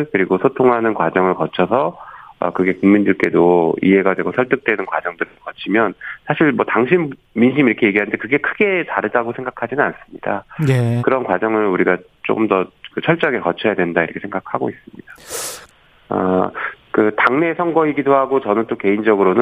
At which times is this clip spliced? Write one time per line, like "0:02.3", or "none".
0:11.0
0:15.7